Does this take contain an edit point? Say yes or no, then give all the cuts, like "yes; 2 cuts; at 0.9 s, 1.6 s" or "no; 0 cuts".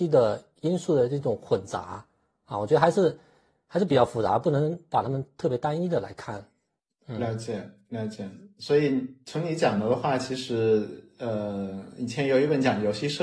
no; 0 cuts